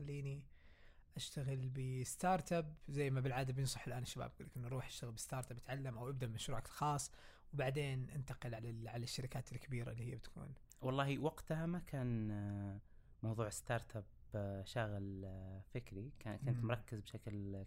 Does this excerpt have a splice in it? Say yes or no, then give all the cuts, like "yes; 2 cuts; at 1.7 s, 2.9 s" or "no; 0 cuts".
no; 0 cuts